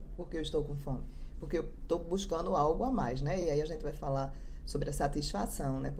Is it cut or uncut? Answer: uncut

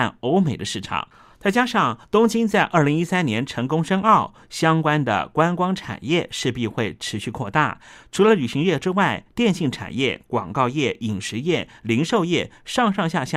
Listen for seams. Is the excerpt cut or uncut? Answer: uncut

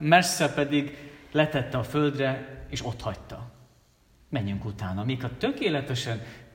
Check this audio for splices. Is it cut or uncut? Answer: cut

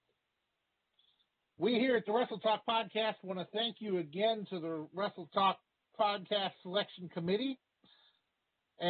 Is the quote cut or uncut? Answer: uncut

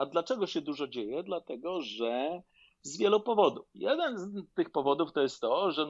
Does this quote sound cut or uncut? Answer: uncut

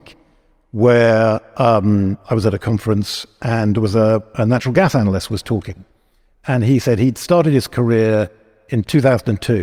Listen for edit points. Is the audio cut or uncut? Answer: uncut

